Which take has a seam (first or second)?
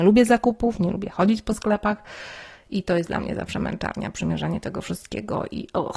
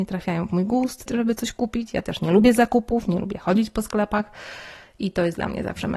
second